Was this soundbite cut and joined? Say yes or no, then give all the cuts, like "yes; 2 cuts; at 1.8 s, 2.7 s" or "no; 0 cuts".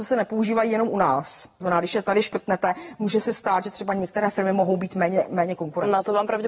yes; 1 cut; at 1.6 s